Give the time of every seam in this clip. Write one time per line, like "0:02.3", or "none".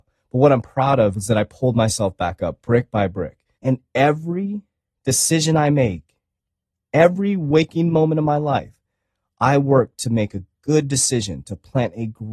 0:03.6